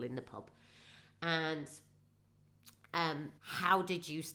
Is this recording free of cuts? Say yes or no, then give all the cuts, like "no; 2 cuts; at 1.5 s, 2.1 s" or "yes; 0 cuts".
no; 1 cut; at 3.4 s